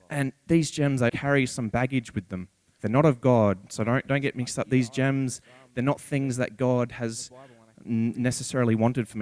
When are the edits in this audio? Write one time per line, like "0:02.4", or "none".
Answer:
0:01.1
0:02.8